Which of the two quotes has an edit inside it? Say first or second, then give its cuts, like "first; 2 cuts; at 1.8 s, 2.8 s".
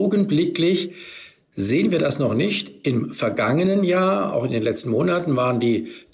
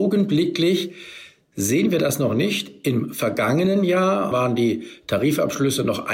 second; 1 cut; at 4.3 s